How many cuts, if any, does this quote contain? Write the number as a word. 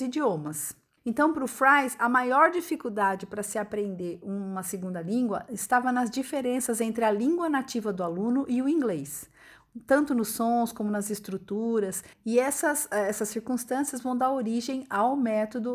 two